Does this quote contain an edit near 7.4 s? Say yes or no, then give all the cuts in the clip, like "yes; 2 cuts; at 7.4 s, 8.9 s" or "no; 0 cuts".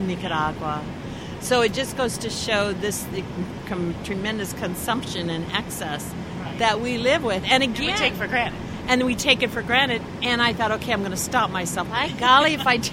no; 1 cut; at 11.9 s